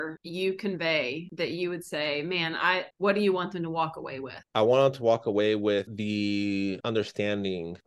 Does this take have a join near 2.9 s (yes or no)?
yes